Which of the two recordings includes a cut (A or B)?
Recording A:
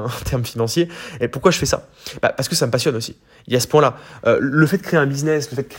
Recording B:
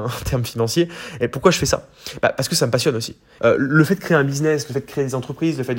B